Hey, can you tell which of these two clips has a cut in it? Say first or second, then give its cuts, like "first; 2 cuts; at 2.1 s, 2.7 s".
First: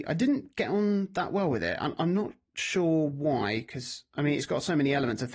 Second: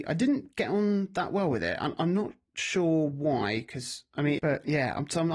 second; 1 cut; at 4.4 s